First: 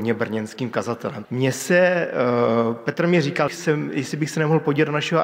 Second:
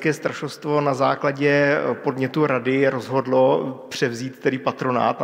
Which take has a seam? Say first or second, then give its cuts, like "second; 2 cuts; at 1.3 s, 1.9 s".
first; 2 cuts; at 1.2 s, 3.5 s